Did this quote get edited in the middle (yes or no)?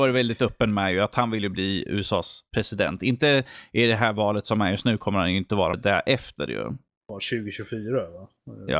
yes